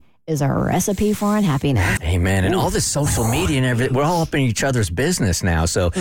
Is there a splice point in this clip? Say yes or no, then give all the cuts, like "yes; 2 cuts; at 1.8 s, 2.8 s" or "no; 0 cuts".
yes; 1 cut; at 2.0 s